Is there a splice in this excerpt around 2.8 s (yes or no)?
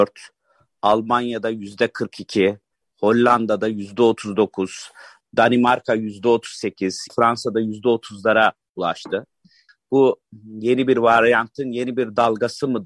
no